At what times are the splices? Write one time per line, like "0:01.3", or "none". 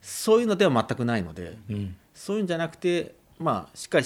none